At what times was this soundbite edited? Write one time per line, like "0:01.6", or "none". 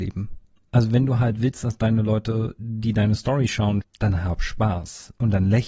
0:03.8